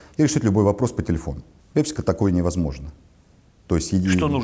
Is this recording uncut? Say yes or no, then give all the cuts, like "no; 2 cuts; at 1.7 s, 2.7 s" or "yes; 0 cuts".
no; 1 cut; at 1.6 s